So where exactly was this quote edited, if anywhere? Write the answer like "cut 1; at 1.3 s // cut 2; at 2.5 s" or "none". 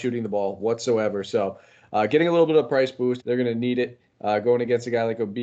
cut 1; at 3.2 s

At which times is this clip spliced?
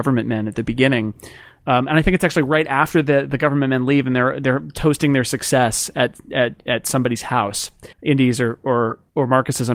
cut 1; at 7.9 s

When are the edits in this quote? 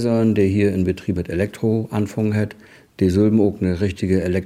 cut 1; at 1.2 s

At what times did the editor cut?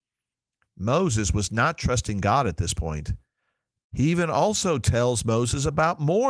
cut 1; at 3.8 s

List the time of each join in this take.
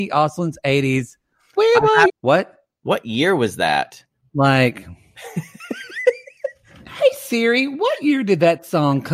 cut 1; at 2.1 s

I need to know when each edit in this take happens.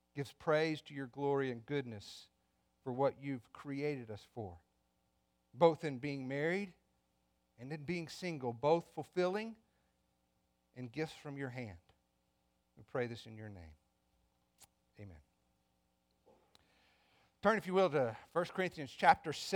cut 1; at 12.6 s

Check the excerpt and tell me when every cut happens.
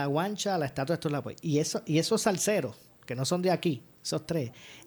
none

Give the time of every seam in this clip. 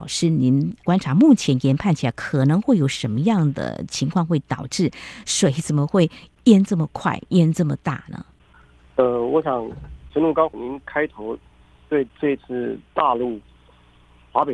none

